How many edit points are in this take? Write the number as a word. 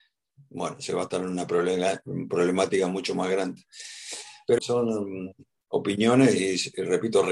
one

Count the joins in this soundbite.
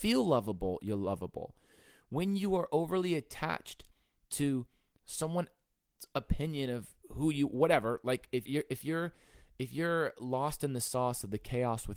one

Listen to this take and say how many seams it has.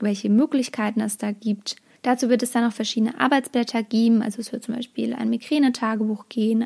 one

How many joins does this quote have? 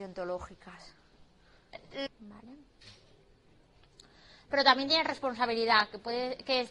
one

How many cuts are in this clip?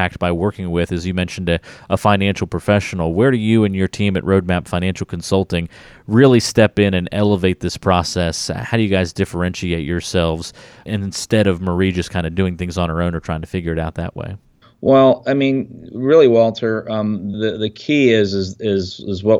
two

